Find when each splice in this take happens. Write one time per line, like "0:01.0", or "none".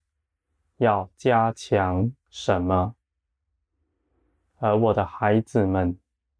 none

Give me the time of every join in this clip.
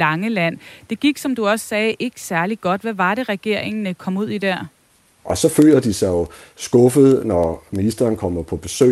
0:05.2

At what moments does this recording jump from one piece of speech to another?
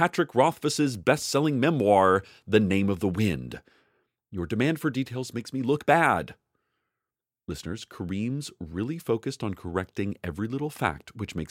none

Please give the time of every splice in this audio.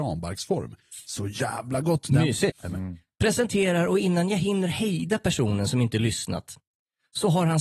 0:02.5

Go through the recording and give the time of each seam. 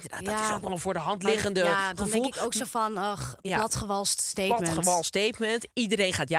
none

